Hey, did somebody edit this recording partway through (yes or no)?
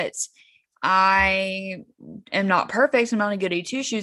yes